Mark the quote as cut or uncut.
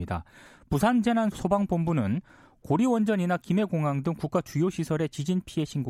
cut